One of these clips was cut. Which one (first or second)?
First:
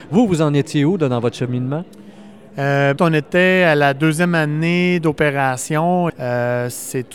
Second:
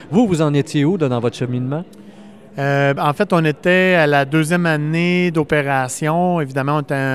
first